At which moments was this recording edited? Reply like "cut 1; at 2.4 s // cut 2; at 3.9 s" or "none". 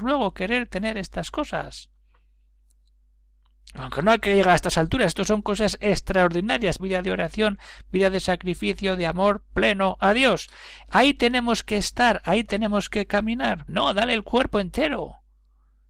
cut 1; at 6.8 s // cut 2; at 13.7 s